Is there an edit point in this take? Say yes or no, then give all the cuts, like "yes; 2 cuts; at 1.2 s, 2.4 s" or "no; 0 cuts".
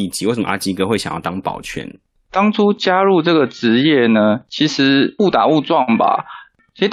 no; 0 cuts